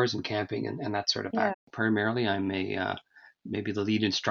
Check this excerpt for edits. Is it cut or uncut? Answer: cut